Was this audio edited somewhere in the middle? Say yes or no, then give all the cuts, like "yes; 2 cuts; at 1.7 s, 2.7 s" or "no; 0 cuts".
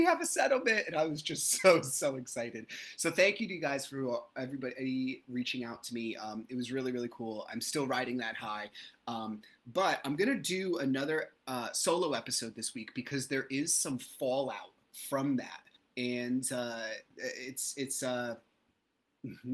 yes; 1 cut; at 17.1 s